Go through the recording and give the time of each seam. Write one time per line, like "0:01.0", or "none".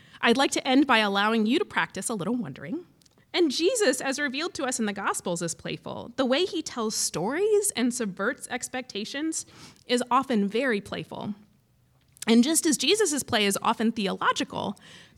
0:03.2